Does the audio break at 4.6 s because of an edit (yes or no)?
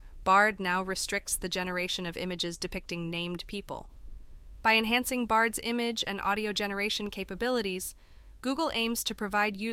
yes